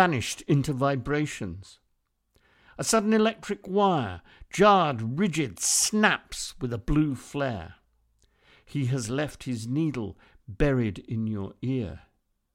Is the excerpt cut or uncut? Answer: uncut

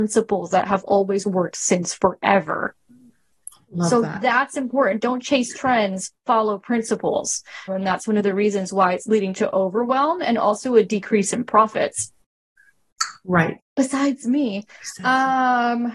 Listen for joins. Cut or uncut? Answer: cut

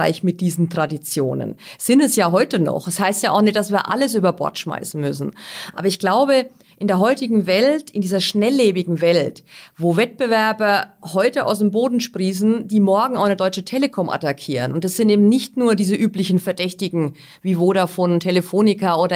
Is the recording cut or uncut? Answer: uncut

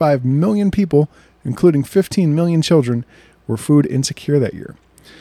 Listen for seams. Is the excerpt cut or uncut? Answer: uncut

